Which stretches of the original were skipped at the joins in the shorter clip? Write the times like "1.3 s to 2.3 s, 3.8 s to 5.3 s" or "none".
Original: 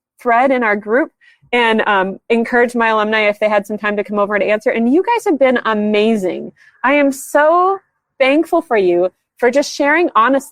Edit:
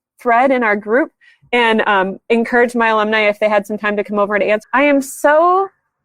4.6 s to 6.7 s